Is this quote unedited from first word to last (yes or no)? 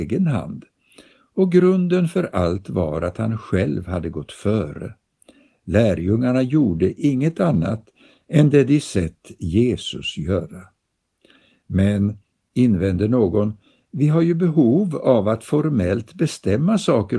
yes